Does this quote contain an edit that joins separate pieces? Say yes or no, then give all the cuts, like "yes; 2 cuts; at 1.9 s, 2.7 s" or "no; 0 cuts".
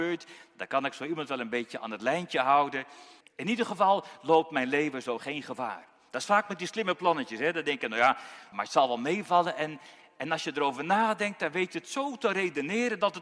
yes; 2 cuts; at 3.2 s, 8.5 s